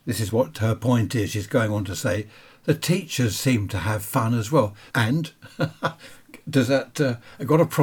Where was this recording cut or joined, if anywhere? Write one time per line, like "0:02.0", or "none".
0:04.9